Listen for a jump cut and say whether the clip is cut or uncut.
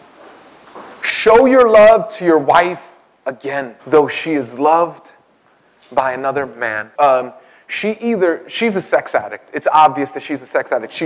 cut